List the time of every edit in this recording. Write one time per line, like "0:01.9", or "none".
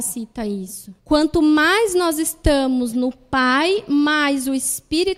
0:01.0